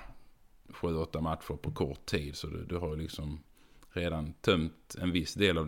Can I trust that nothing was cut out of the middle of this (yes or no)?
yes